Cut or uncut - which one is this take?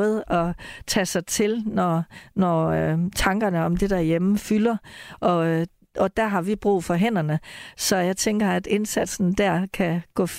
uncut